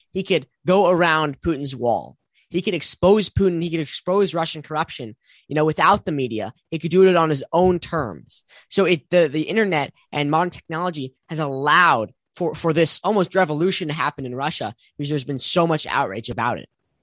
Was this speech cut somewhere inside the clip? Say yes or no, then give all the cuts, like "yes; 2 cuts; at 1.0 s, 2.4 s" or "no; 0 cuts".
no; 0 cuts